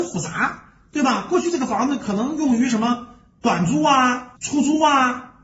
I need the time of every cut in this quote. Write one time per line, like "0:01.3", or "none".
0:04.4